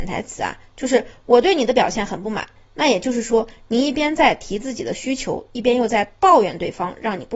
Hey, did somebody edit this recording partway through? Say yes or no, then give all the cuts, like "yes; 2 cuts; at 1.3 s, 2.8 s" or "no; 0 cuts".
no; 0 cuts